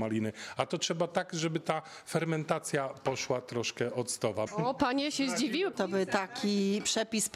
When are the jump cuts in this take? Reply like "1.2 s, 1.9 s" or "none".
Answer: 4.5 s, 5.7 s